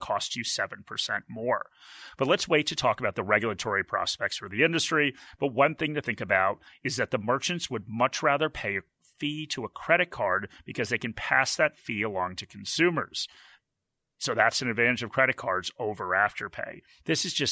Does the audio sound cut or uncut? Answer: uncut